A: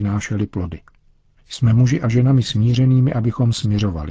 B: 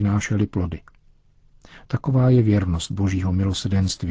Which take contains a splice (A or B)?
A